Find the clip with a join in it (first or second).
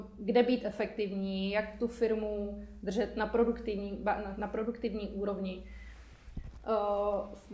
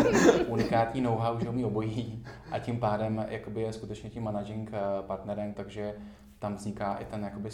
second